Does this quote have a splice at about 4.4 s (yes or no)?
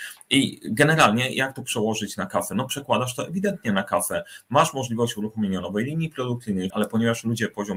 no